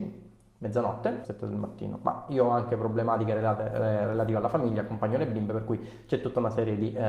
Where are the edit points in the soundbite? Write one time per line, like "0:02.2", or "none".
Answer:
0:01.2